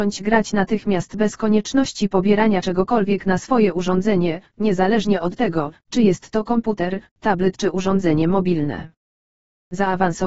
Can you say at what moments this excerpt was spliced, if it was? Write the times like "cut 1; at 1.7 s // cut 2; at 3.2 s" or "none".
none